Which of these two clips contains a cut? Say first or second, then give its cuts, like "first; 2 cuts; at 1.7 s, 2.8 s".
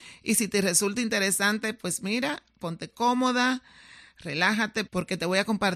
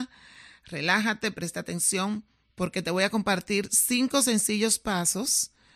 first; 1 cut; at 4.9 s